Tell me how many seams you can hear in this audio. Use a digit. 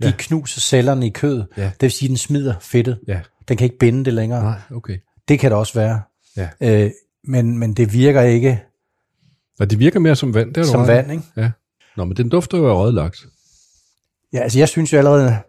1